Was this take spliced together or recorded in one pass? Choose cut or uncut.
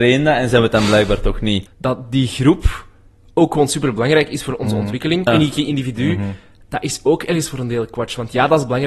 cut